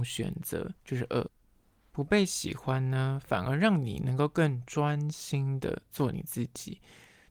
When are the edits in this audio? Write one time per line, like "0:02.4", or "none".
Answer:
none